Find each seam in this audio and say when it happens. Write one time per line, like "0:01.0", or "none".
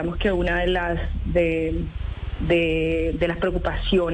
none